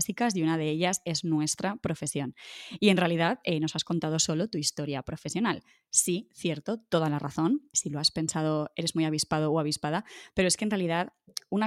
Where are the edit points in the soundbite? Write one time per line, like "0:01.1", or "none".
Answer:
0:07.7